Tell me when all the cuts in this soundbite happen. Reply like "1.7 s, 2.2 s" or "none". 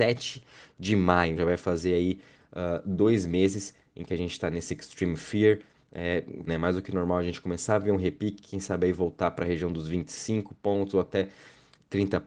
1.4 s, 6.5 s